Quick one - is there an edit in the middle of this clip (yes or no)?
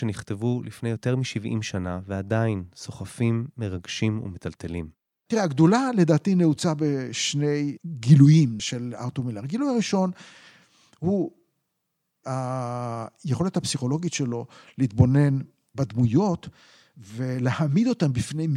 yes